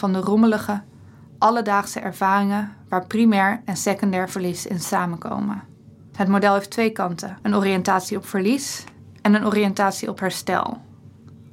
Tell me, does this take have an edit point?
yes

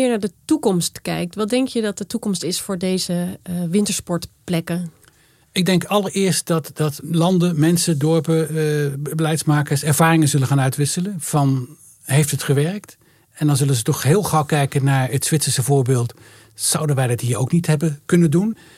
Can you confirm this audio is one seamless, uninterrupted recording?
yes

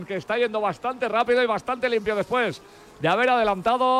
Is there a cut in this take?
no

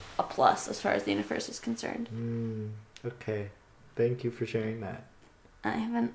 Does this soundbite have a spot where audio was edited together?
no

